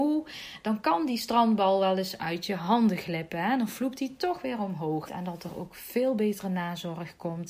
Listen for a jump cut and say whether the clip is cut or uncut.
cut